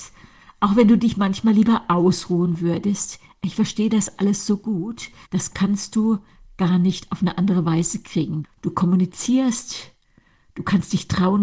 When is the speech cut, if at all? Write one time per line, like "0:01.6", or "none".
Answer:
0:05.2
0:08.4